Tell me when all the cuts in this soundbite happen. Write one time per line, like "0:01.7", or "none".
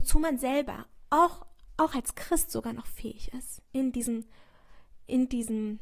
none